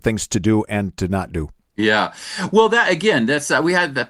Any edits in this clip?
no; 0 cuts

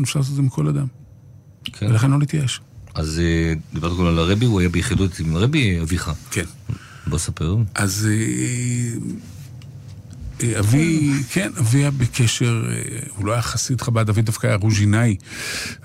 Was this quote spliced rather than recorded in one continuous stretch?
no; 0 cuts

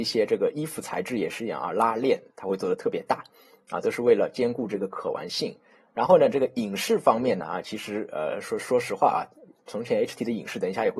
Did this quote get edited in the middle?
no; 0 cuts

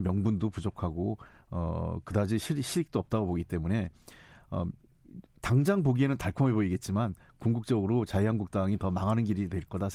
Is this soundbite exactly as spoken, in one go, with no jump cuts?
yes; 0 cuts

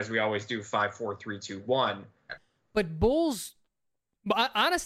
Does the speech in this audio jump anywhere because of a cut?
yes; 1 cut; at 2.3 s

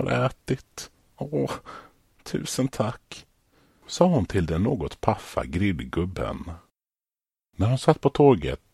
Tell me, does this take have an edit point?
no; 0 cuts

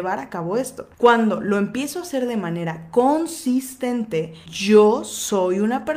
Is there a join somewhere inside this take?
yes; 2 cuts; at 0.9 s, 4.5 s

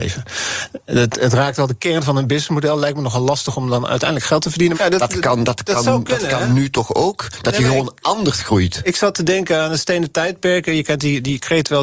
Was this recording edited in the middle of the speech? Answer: yes; 1 cut; at 4.7 s

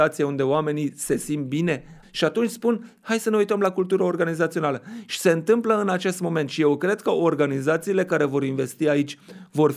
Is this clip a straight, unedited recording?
no; 1 cut; at 2.0 s

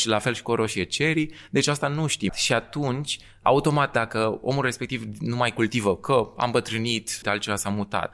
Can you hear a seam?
yes; 2 cuts; at 2.3 s, 7.2 s

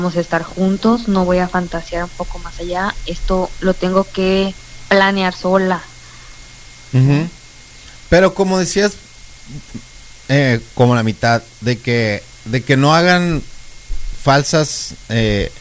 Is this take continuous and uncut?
yes; 0 cuts

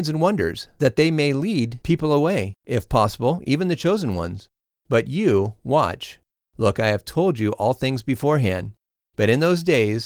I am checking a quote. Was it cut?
no; 0 cuts

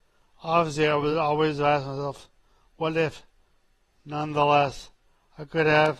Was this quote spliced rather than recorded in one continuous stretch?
no; 0 cuts

